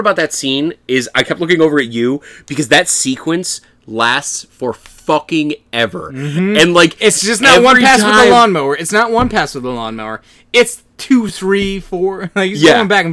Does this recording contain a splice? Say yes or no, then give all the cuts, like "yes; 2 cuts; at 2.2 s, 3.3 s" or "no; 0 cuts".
no; 0 cuts